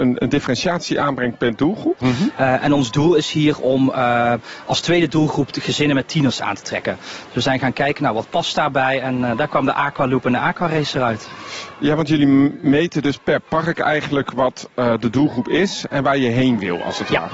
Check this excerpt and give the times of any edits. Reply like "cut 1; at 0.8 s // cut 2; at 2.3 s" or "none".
cut 1; at 2.0 s